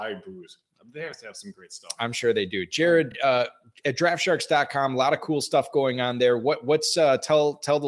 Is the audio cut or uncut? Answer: uncut